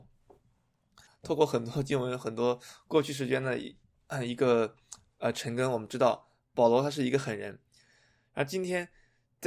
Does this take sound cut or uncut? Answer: cut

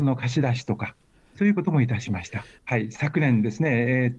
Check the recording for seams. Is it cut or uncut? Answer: cut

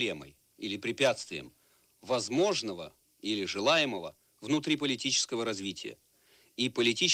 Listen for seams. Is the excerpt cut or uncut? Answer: uncut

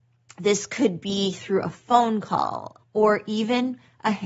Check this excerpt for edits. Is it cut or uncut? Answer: cut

